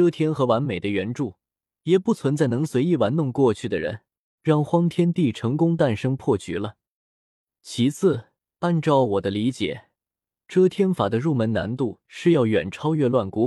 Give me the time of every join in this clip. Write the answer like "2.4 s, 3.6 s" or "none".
4.4 s, 8.5 s